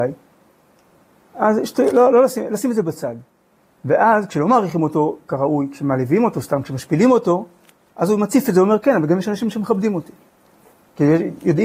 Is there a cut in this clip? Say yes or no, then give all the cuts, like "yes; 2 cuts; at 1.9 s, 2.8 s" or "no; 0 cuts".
no; 0 cuts